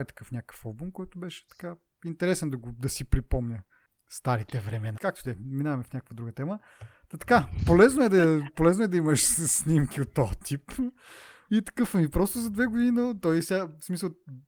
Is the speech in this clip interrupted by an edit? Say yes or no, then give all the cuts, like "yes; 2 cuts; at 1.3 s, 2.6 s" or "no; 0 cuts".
yes; 2 cuts; at 4.9 s, 11.5 s